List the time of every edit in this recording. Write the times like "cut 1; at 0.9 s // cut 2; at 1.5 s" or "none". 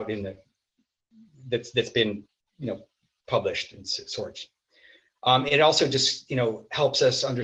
none